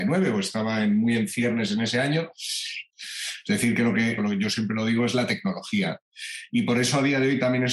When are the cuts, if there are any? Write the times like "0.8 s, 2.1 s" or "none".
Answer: 2.9 s, 4.2 s